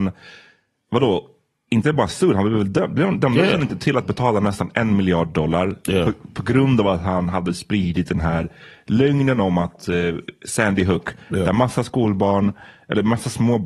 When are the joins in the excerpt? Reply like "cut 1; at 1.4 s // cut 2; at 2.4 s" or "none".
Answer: none